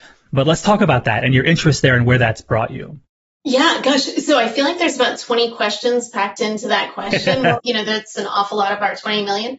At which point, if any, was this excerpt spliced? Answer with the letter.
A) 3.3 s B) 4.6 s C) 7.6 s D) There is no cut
C